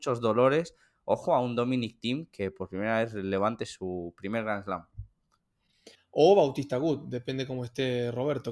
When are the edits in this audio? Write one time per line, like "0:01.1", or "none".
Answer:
0:06.0